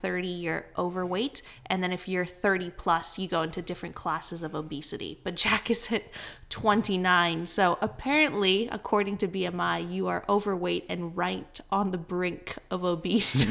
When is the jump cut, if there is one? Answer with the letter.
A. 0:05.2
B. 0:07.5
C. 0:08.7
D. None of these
D